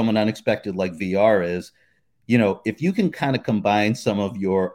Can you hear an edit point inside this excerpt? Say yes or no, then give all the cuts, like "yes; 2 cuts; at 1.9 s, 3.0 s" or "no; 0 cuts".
no; 0 cuts